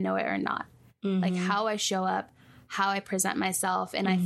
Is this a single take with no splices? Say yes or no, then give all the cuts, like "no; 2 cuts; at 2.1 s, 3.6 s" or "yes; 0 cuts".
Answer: yes; 0 cuts